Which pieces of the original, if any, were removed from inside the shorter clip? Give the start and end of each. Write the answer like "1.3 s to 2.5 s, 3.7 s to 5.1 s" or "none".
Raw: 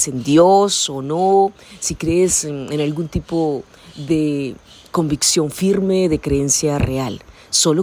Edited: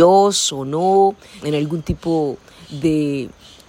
1.8 s to 2.7 s

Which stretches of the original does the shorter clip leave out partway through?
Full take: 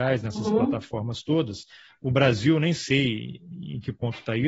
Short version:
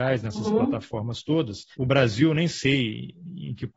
1.7 s to 2.0 s

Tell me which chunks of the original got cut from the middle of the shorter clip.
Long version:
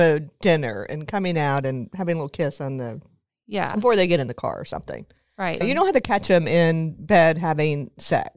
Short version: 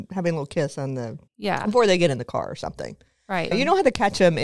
3.1 s to 3.4 s

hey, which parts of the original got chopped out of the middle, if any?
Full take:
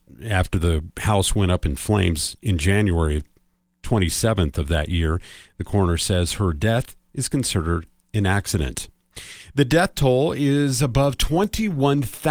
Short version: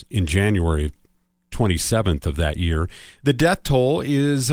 5.5 s to 9.5 s

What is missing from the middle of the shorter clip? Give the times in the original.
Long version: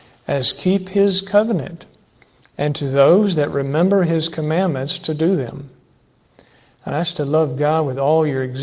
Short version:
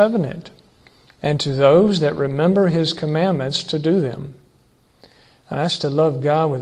none

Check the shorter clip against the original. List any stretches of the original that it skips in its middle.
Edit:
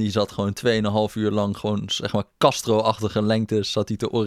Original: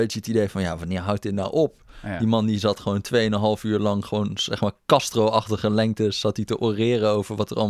none

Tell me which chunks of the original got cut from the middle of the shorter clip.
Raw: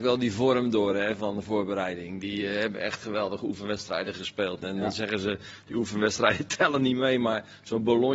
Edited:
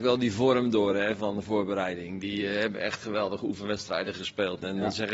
none

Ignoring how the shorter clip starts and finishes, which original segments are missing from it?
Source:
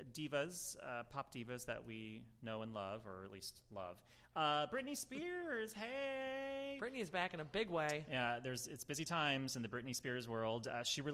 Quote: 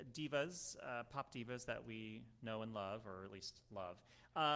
none

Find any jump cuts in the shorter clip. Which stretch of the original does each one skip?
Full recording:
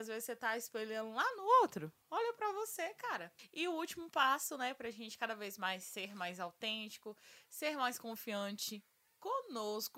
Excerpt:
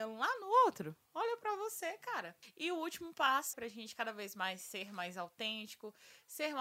4.5 s to 4.8 s

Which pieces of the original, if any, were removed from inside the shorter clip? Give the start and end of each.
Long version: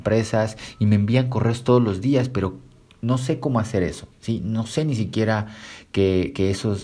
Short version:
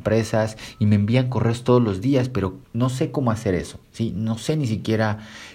2.6 s to 2.9 s

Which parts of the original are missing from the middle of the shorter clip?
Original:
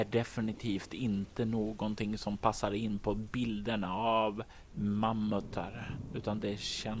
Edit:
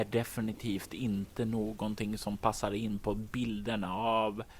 none

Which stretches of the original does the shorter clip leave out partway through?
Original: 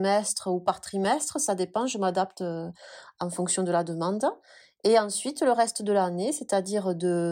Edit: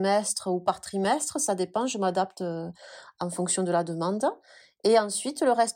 none

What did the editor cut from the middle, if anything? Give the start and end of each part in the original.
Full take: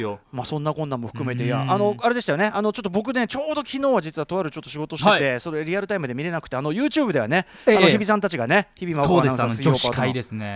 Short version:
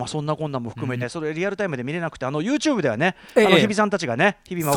1.4 s to 5.3 s

